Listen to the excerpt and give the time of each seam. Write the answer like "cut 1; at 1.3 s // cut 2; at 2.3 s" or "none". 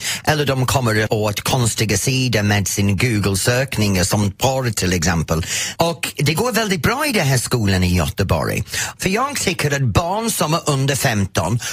cut 1; at 1.1 s // cut 2; at 5.8 s // cut 3; at 9.0 s